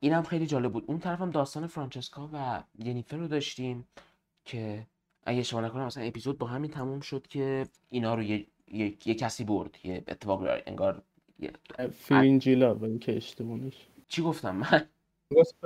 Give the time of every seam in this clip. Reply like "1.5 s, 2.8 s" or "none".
7.8 s, 14.0 s